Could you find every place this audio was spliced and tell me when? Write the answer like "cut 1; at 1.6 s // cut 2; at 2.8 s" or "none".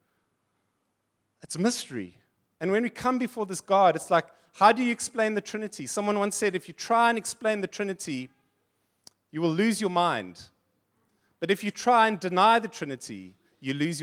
none